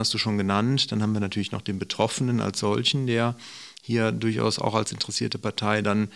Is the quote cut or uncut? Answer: uncut